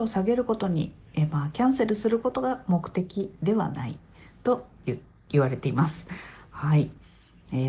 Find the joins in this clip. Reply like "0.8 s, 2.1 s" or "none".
none